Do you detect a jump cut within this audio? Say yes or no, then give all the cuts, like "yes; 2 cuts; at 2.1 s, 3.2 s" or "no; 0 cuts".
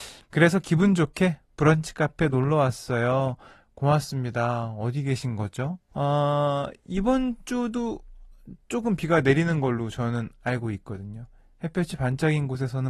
yes; 1 cut; at 5.9 s